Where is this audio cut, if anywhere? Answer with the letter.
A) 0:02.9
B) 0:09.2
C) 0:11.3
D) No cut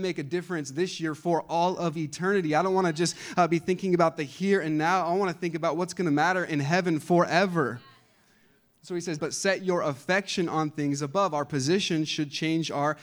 B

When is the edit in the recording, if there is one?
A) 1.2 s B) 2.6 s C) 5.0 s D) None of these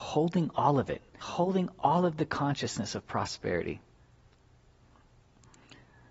A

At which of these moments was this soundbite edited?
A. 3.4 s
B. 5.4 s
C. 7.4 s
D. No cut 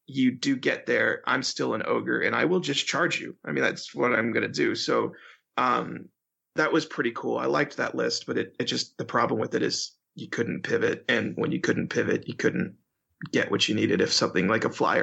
D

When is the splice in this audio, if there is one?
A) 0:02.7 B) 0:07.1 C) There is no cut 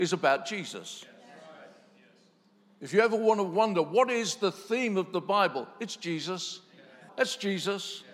B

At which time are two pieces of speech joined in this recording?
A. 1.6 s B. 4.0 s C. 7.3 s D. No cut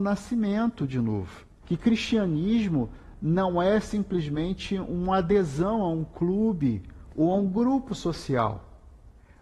A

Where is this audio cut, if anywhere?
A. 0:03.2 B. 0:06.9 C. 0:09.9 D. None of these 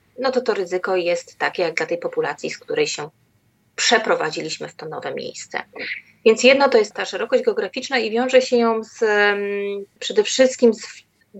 B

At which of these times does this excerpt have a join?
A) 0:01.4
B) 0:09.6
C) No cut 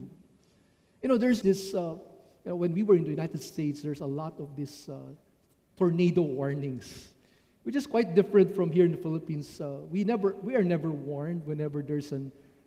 A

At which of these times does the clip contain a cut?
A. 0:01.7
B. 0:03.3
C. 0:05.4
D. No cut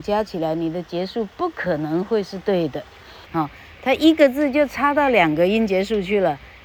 B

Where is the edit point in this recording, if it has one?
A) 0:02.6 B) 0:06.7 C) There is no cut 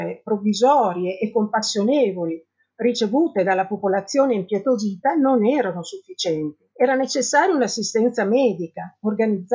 B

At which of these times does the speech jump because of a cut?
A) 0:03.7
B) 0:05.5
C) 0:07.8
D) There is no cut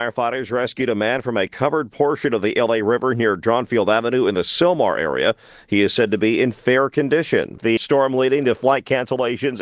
C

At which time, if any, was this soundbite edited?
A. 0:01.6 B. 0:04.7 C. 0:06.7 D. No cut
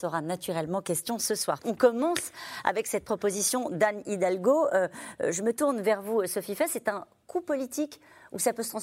A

